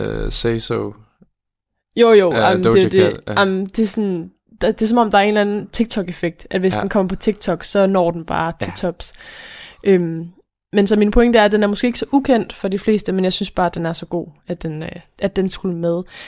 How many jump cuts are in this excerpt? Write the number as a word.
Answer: zero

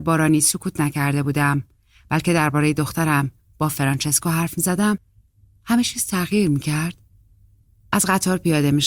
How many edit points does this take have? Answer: zero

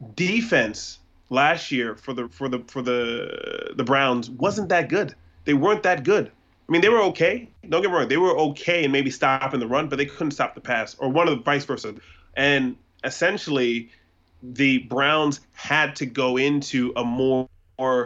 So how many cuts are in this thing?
one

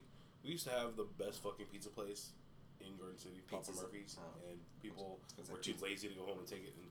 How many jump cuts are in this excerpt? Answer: zero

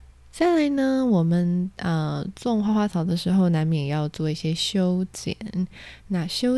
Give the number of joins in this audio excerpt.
one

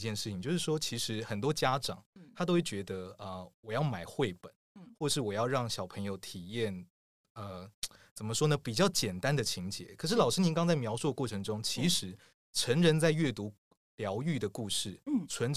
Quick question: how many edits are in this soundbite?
zero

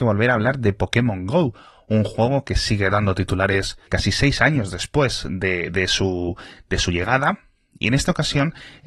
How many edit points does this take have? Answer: one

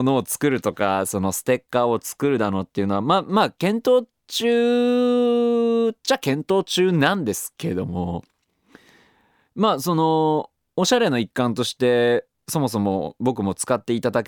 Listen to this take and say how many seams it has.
zero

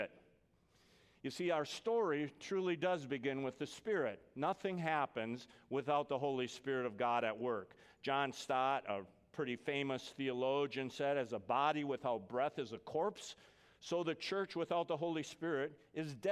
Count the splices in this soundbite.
zero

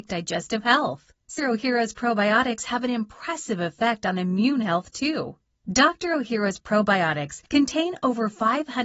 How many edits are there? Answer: one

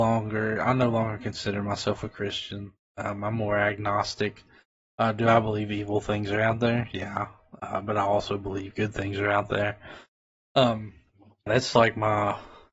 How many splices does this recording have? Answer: one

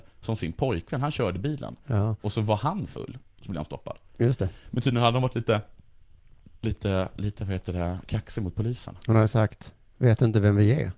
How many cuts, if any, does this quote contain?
zero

